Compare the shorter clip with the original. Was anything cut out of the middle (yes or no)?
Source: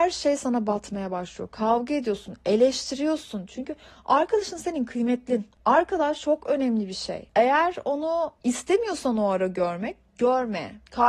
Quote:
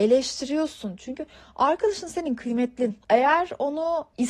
yes